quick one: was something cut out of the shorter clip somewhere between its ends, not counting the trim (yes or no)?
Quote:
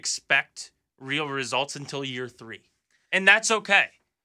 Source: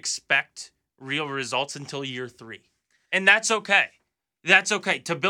no